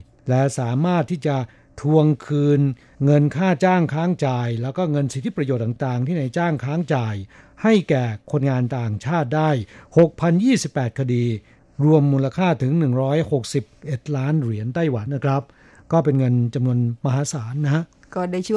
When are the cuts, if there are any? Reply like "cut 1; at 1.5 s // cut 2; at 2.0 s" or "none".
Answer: cut 1; at 15.1 s